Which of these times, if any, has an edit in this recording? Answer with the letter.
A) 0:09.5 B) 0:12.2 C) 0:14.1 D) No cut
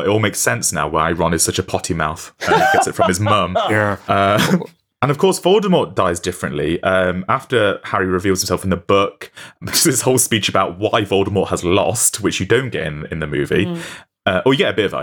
D